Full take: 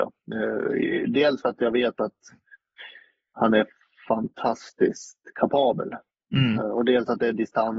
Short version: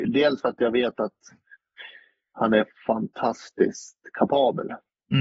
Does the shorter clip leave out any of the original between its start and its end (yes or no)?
yes